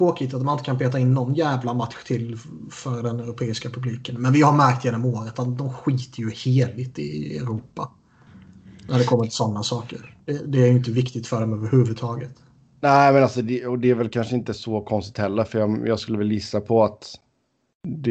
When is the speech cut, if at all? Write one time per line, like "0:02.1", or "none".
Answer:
none